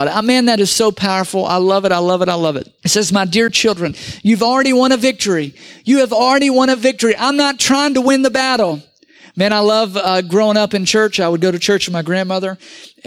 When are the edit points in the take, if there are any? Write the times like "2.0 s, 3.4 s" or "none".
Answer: 2.8 s